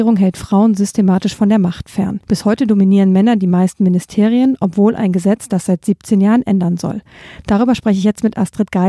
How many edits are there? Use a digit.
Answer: 0